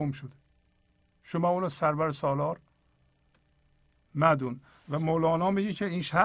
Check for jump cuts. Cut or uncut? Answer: uncut